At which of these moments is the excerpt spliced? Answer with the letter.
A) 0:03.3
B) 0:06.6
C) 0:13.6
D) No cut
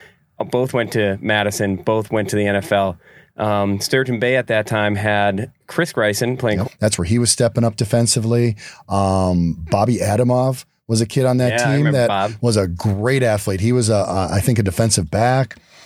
B